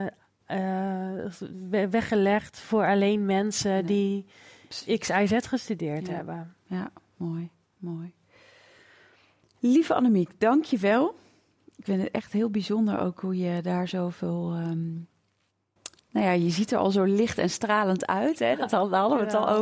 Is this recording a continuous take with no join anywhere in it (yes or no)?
yes